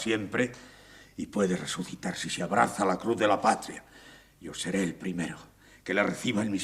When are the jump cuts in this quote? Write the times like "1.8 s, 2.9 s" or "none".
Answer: none